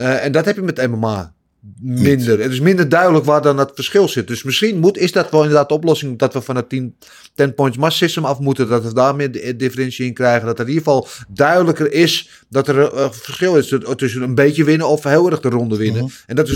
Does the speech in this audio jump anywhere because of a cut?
no; 0 cuts

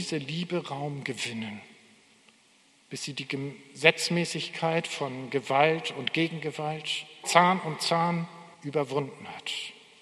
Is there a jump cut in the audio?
yes; 2 cuts; at 7.2 s, 8.5 s

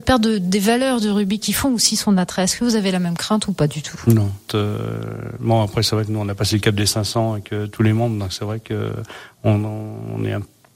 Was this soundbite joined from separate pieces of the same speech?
yes; 1 cut; at 4.5 s

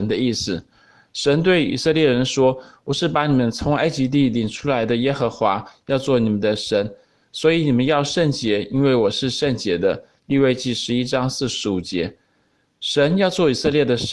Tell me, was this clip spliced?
no; 0 cuts

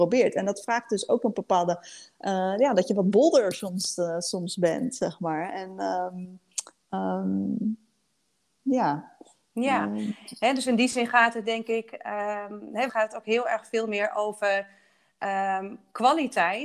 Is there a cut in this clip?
yes; 1 cut; at 12.9 s

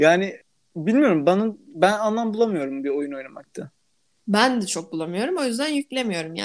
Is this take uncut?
yes; 0 cuts

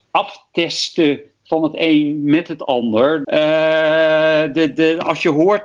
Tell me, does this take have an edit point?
yes; 2 cuts; at 3.2 s, 4.7 s

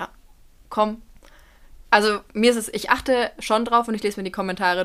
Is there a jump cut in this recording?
no; 0 cuts

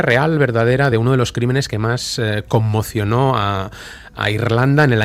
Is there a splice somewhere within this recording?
no; 0 cuts

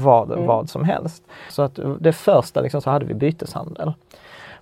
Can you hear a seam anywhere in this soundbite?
yes; 2 cuts; at 1.5 s, 2.8 s

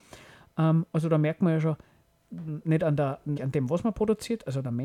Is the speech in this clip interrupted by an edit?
yes; 1 cut; at 3.4 s

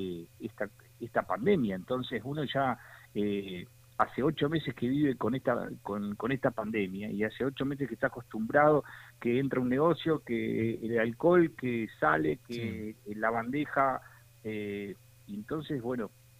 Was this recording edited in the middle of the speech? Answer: no; 0 cuts

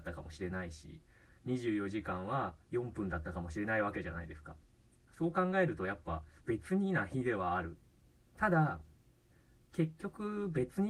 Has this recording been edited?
yes; 2 cuts; at 2.6 s, 6.4 s

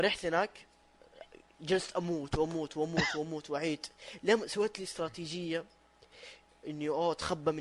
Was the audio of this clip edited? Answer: no; 0 cuts

